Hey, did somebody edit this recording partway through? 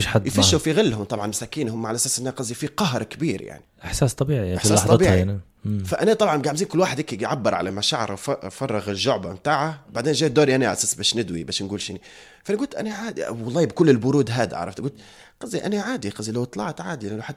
no; 0 cuts

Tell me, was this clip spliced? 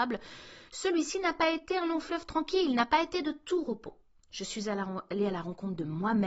no; 0 cuts

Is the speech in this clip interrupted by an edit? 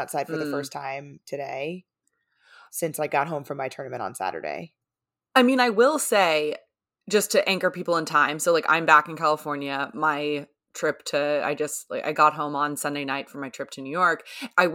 no; 0 cuts

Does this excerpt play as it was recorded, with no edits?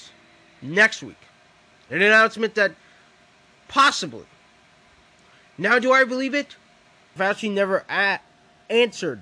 no; 1 cut; at 7.2 s

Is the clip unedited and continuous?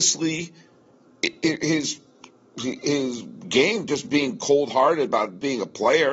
yes; 0 cuts

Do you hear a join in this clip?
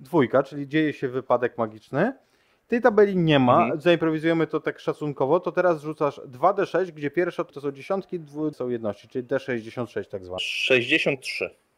yes; 3 cuts; at 7.5 s, 8.5 s, 10.4 s

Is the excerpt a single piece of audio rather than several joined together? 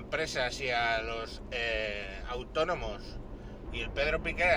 no; 1 cut; at 3.7 s

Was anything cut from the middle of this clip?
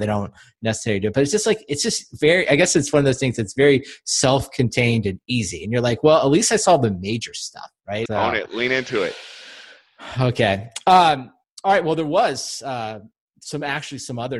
yes; 1 cut; at 8.1 s

